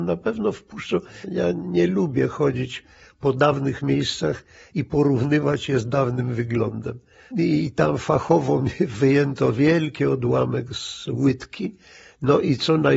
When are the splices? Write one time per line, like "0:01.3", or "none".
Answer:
0:01.2
0:07.3